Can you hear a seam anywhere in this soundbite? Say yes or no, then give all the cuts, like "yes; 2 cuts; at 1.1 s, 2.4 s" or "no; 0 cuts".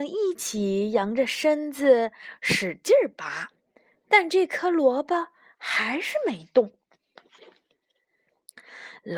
no; 0 cuts